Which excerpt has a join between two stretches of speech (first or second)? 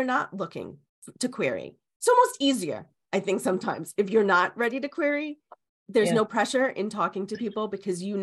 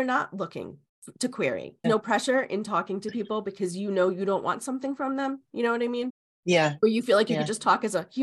second